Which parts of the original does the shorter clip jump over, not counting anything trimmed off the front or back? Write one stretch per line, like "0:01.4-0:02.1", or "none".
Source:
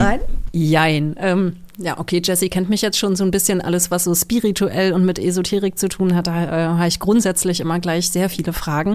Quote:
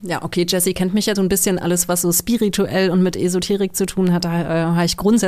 0:02.9-0:03.2